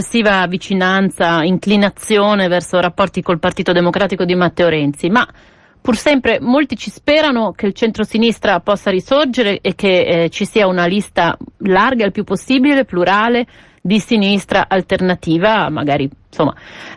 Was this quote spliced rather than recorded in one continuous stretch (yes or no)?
no